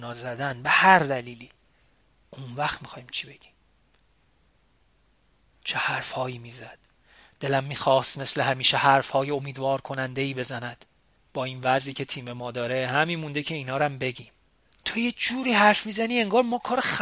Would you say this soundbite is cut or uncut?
uncut